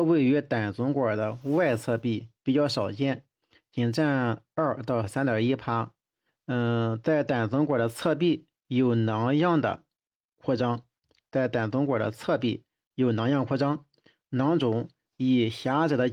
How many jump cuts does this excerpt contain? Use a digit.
1